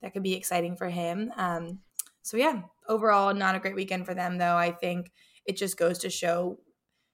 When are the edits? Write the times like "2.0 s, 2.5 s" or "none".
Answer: none